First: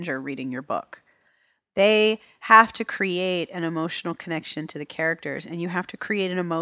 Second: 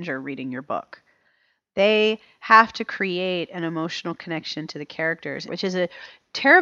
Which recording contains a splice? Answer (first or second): second